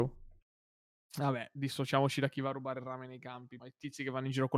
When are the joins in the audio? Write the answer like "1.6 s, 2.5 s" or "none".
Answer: 3.6 s